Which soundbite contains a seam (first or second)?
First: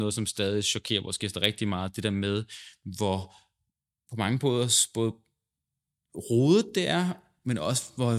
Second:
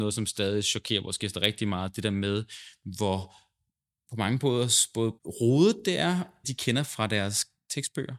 second